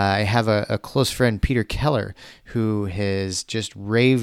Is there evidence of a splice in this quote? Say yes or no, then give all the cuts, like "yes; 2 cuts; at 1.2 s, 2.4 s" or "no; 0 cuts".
no; 0 cuts